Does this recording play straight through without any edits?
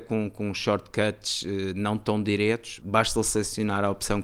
no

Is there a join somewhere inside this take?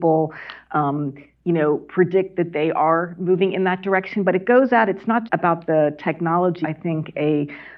yes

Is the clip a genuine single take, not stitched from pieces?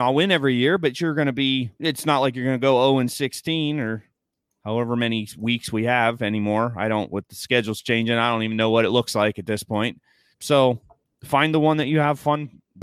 no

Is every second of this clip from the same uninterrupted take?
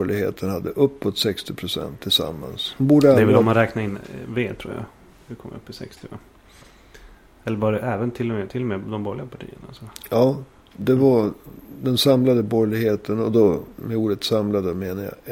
yes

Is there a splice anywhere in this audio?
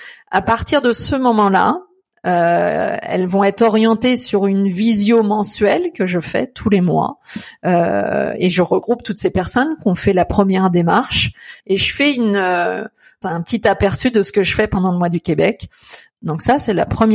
yes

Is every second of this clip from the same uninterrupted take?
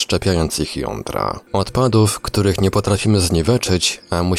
no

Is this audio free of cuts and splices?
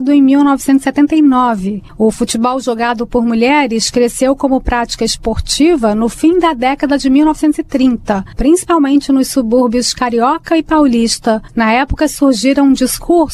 no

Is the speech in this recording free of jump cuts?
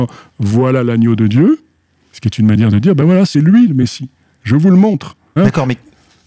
no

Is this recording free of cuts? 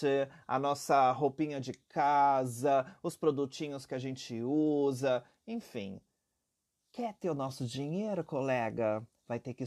yes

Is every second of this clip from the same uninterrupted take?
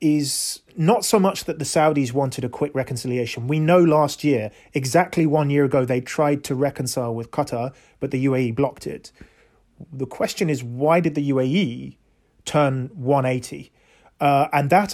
yes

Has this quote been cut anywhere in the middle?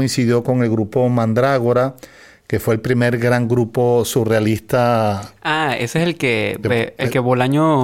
no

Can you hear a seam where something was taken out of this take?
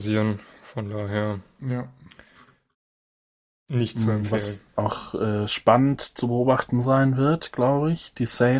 no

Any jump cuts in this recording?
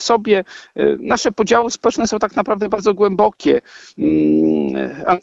no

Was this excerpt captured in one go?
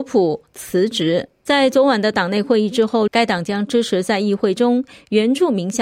no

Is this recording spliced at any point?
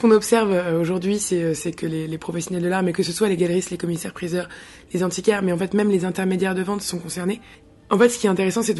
no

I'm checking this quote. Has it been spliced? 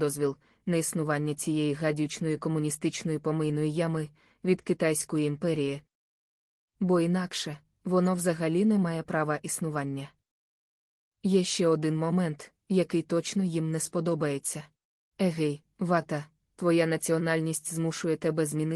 yes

